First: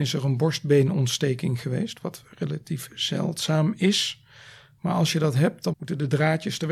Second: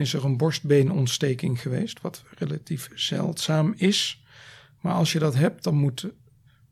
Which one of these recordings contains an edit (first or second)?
first